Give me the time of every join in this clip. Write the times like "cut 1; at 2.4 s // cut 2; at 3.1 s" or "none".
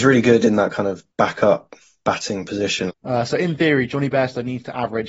cut 1; at 1.1 s // cut 2; at 2.9 s

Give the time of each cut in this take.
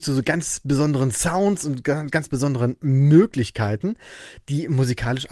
none

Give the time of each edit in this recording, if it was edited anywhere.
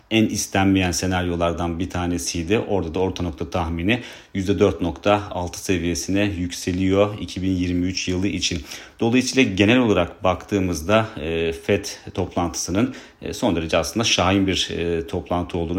none

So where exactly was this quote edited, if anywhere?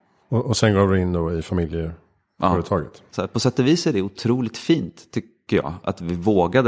cut 1; at 3.1 s

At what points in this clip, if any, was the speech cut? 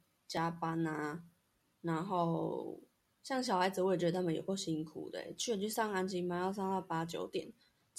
none

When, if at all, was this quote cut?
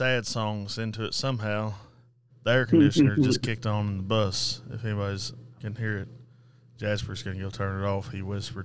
cut 1; at 2.3 s

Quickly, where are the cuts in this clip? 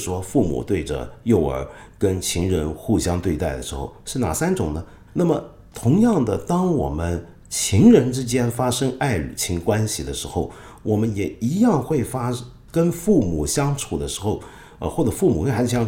cut 1; at 5.1 s

